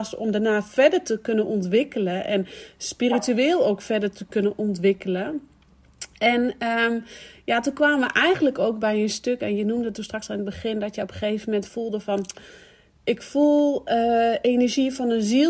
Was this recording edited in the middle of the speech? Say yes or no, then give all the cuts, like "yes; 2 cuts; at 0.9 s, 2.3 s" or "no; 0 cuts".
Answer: no; 0 cuts